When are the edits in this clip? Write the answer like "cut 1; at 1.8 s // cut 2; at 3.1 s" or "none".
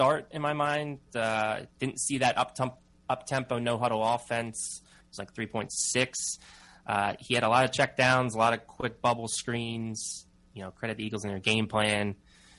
cut 1; at 5.0 s

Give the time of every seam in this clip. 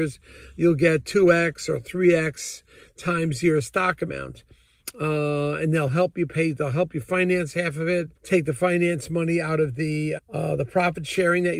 cut 1; at 8.2 s // cut 2; at 10.2 s

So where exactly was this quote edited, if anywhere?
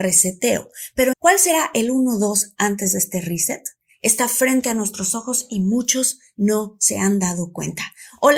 cut 1; at 1.1 s // cut 2; at 3.9 s

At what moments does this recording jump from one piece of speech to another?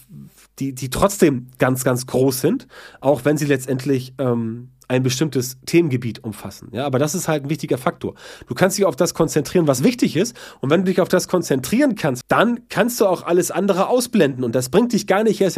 cut 1; at 12.2 s

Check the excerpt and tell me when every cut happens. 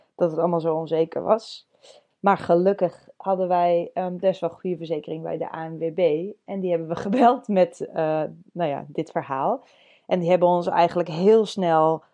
none

